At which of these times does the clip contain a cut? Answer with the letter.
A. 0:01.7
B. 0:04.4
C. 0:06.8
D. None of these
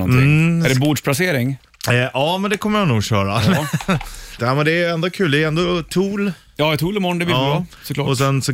B